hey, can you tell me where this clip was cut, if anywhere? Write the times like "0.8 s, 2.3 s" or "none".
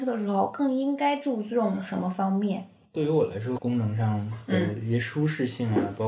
3.6 s

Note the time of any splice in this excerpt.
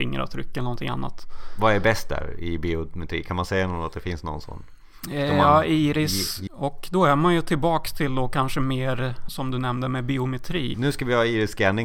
6.5 s, 9.3 s, 10.7 s

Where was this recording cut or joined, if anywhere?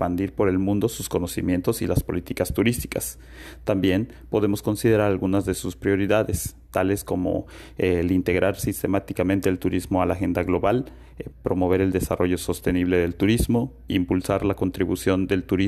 11.3 s

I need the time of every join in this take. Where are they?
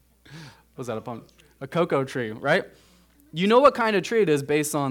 none

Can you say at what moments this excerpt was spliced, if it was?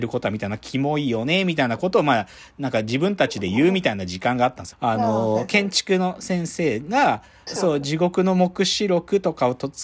4.7 s, 7.5 s

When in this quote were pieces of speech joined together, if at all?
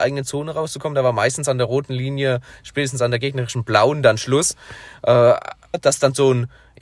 5.7 s

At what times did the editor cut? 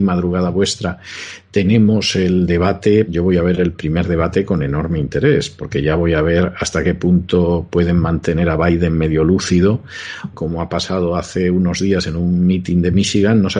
3.1 s, 10.3 s

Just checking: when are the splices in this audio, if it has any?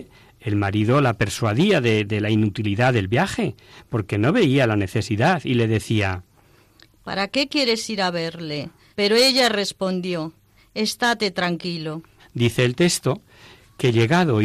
8.9 s, 12.2 s

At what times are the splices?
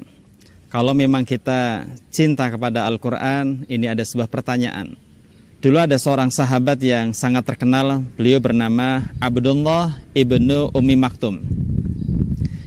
5.5 s

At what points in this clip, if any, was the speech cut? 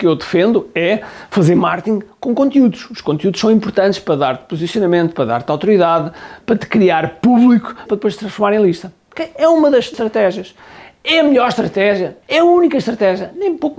7.9 s, 12.2 s

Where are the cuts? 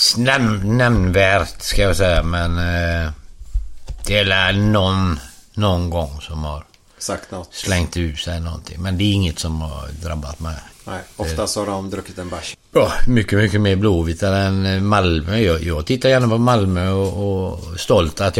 10.7 s, 12.5 s

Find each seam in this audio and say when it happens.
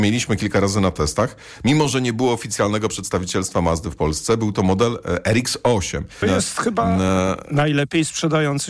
6.2 s

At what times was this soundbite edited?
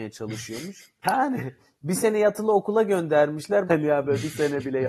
1.0 s, 3.7 s

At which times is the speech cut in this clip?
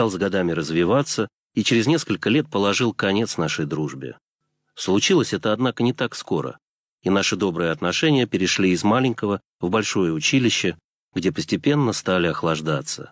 none

